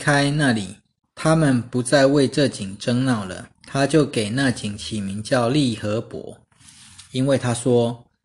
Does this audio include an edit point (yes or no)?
yes